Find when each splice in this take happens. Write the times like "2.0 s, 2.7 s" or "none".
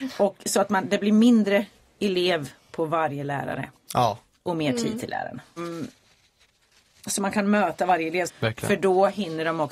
5.6 s, 8.3 s